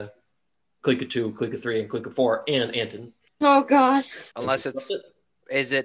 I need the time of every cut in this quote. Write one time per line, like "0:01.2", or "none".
0:03.3
0:04.3